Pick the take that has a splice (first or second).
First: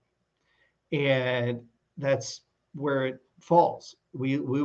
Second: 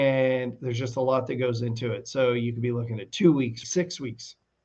second